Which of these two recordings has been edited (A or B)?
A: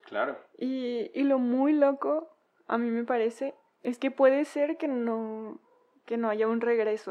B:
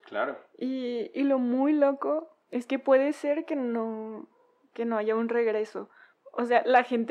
B